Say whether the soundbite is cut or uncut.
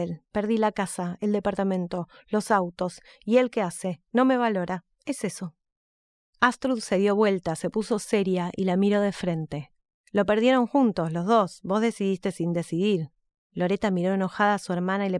uncut